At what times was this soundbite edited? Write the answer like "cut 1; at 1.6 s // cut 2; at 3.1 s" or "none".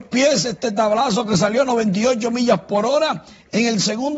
none